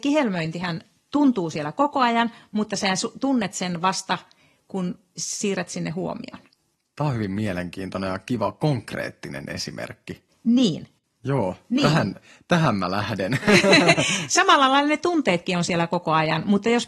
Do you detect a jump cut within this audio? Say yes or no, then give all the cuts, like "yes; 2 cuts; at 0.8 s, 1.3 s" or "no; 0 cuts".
no; 0 cuts